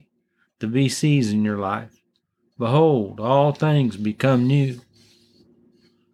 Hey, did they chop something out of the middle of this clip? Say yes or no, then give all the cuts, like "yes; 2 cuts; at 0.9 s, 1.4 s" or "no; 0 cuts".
no; 0 cuts